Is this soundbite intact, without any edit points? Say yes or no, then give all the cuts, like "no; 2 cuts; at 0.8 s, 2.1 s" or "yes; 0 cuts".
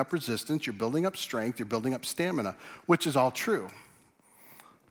yes; 0 cuts